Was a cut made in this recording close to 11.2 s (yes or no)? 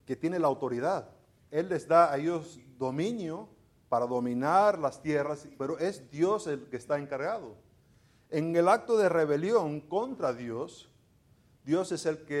no